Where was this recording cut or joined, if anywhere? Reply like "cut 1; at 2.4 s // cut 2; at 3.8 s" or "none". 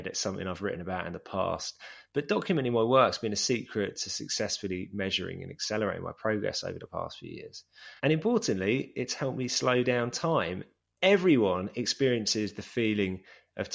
none